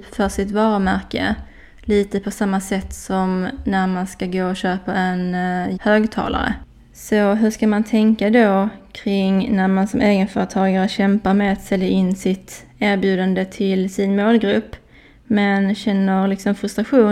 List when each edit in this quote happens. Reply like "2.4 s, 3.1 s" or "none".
5.8 s